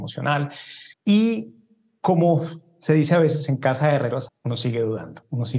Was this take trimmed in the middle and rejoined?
yes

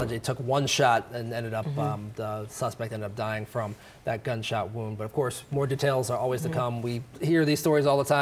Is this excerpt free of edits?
yes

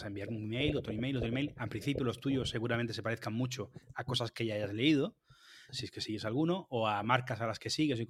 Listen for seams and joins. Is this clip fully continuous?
no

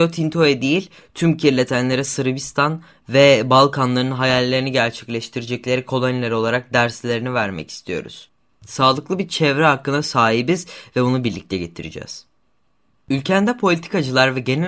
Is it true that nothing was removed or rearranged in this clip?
yes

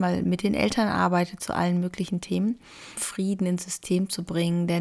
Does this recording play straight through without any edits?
no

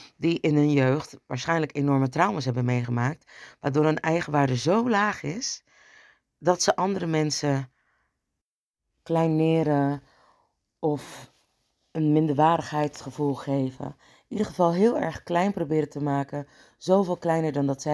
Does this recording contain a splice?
no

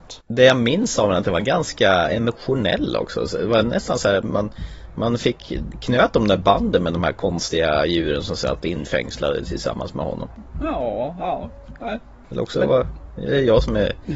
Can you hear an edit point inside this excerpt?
no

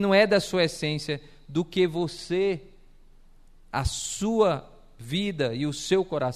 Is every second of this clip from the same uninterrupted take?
yes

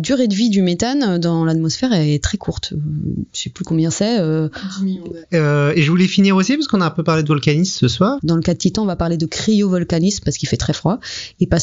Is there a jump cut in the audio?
yes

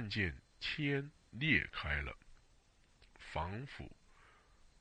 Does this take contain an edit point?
yes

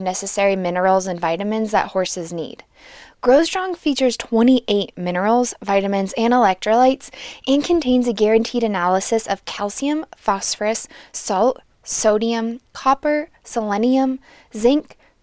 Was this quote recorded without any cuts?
yes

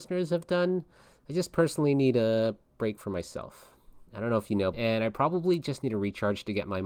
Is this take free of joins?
no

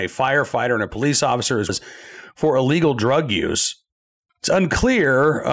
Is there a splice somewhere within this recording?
yes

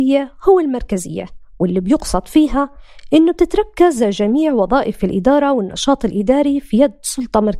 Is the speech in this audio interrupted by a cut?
no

